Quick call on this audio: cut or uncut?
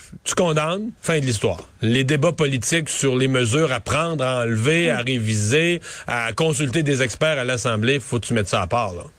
cut